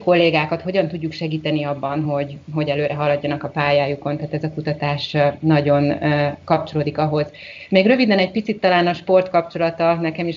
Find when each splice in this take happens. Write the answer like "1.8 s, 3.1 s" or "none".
none